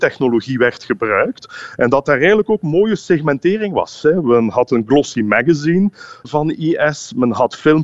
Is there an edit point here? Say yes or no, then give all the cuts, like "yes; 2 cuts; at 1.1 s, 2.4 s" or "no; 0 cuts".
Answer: yes; 1 cut; at 6.2 s